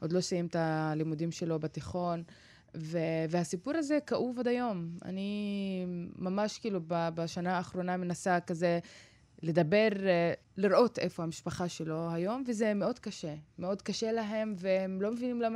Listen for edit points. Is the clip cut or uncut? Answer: uncut